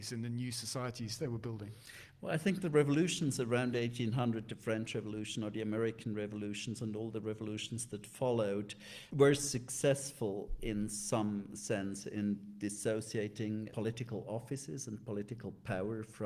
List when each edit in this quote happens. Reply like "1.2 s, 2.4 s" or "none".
9.1 s, 13.7 s